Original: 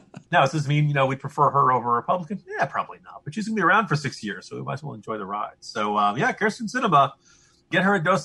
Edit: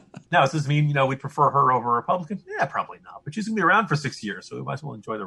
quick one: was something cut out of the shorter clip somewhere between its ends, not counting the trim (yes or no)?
no